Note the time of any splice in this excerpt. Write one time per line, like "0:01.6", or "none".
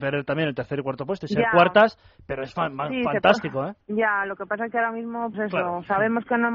0:03.8
0:05.3